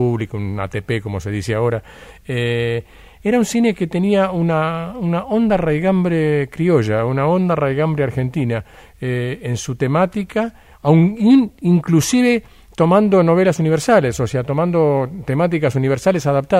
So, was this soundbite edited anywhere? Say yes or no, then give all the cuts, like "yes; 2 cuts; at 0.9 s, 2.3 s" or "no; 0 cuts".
no; 0 cuts